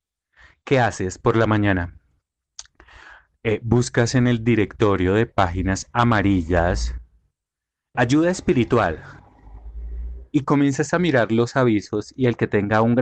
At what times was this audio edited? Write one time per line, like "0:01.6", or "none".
0:07.9